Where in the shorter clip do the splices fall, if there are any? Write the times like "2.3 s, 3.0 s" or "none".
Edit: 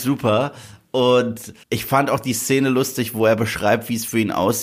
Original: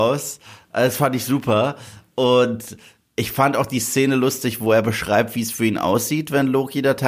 1.6 s